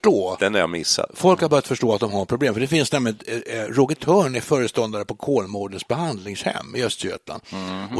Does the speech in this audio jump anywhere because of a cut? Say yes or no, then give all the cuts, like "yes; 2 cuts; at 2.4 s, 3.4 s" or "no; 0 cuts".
no; 0 cuts